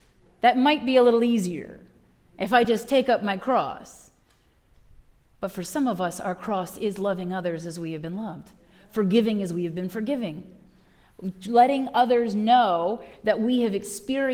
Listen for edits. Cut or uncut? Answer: uncut